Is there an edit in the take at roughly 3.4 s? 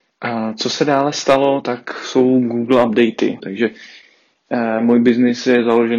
yes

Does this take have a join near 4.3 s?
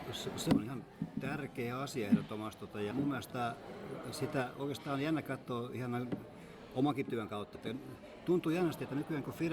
no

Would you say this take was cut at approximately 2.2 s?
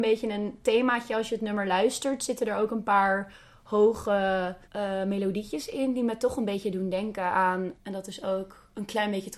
no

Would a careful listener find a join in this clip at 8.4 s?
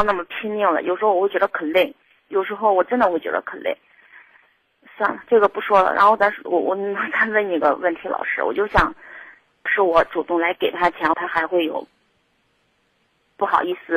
no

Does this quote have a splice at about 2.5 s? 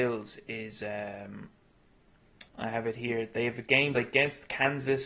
yes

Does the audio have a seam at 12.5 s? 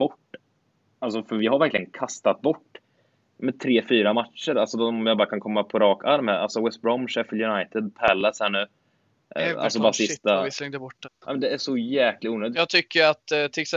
yes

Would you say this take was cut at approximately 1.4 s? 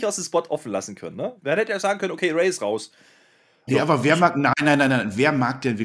yes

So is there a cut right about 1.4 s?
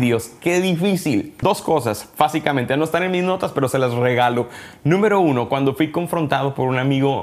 yes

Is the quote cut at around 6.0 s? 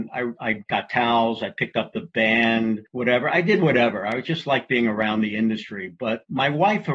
no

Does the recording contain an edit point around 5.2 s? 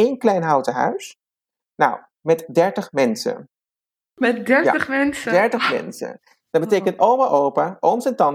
no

